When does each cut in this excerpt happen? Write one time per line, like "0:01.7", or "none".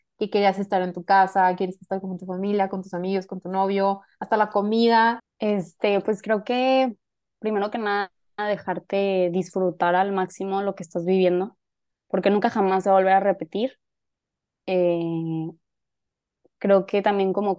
0:05.2